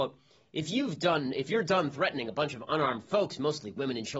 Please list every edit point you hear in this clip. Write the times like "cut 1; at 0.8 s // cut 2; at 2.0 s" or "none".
none

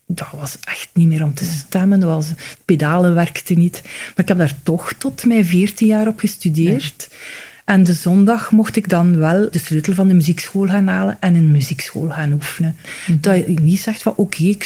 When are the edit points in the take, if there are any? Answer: cut 1; at 9.5 s // cut 2; at 12.8 s

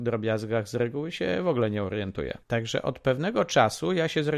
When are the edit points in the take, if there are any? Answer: cut 1; at 2.4 s

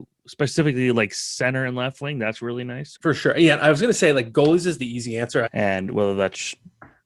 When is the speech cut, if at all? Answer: cut 1; at 3.0 s // cut 2; at 5.5 s

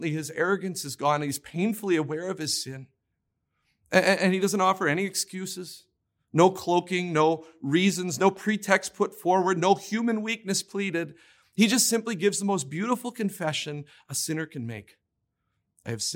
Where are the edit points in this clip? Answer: none

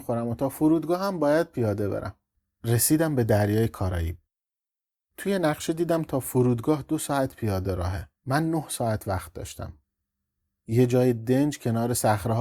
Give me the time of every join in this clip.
cut 1; at 8.2 s

